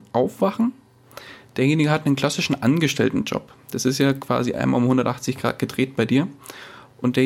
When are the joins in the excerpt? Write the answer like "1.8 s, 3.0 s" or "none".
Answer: none